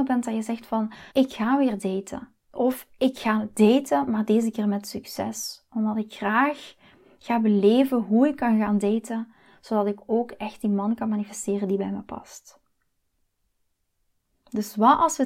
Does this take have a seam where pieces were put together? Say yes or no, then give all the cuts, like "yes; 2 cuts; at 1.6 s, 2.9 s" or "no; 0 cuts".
yes; 2 cuts; at 1.1 s, 2.4 s